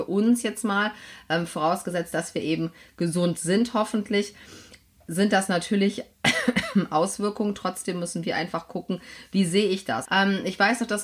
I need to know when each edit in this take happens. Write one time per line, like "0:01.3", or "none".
0:10.0

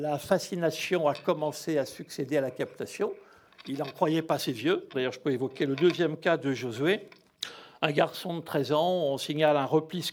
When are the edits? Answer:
0:04.9

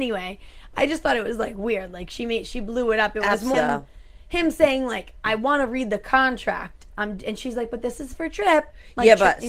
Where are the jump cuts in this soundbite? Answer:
0:03.5

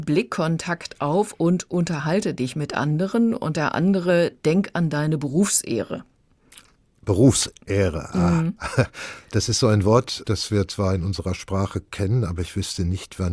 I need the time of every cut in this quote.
0:10.2

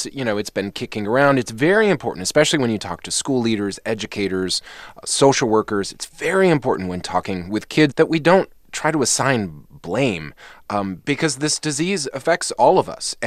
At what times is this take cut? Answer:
0:07.9

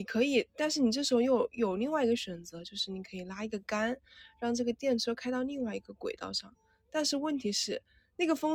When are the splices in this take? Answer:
none

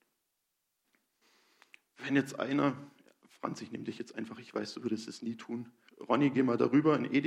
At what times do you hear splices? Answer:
0:05.9

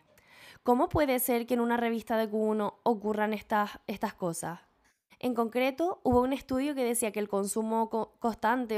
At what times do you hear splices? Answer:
0:05.1

